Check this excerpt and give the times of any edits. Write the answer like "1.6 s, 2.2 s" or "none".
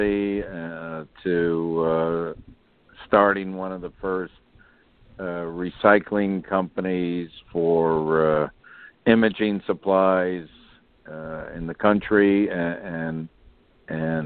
none